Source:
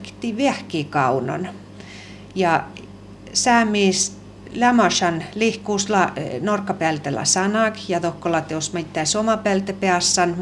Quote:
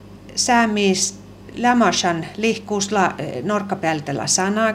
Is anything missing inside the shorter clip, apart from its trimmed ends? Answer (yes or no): no